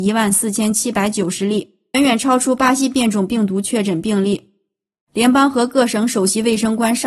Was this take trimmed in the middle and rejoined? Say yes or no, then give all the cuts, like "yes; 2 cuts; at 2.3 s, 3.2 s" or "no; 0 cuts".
yes; 2 cuts; at 1.9 s, 4.9 s